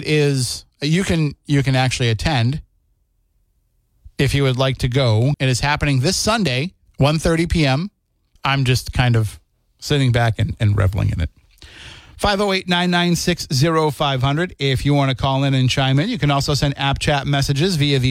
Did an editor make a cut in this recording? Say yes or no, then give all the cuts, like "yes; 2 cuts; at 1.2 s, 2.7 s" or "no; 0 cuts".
yes; 3 cuts; at 5.3 s, 6.9 s, 8.4 s